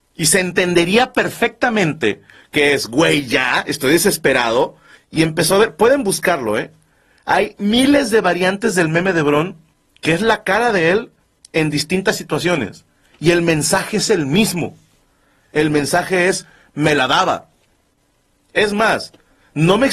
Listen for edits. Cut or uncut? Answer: cut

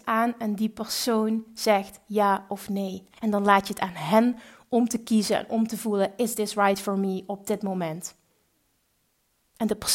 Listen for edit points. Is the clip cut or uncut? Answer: cut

